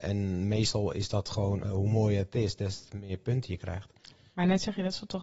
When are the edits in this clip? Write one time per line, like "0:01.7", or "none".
0:01.6